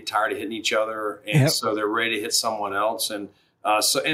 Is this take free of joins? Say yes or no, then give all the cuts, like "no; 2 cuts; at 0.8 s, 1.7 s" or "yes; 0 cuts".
yes; 0 cuts